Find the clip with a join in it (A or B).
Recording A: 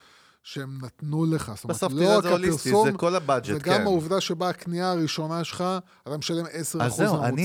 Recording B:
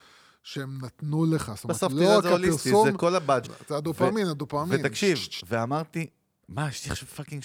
B